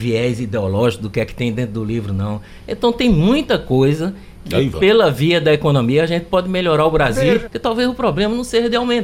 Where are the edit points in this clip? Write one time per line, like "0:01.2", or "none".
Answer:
0:07.5

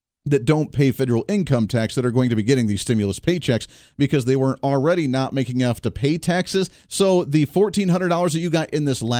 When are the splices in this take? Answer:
0:06.8

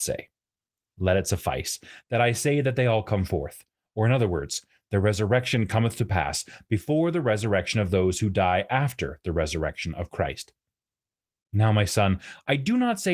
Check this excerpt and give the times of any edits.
none

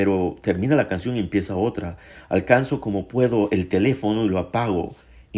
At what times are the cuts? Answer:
none

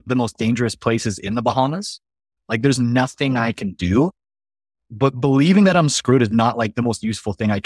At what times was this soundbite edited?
0:02.4

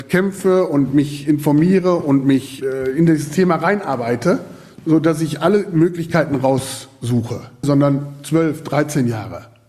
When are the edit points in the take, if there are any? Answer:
0:07.6

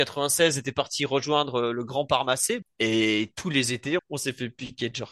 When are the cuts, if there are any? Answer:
0:02.6
0:04.0

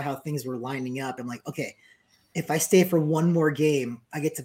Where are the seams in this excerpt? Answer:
none

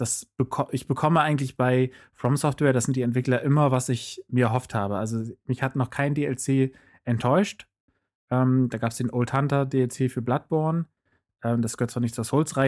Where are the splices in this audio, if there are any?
none

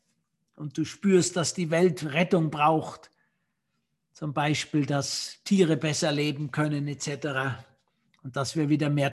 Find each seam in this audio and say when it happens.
none

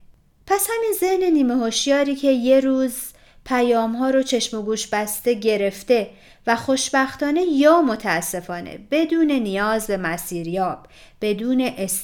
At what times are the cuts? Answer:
none

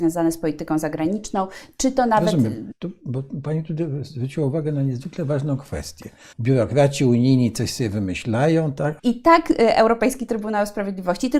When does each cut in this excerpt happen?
0:02.7
0:06.3
0:09.0

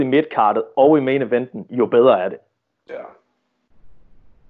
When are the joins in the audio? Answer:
none

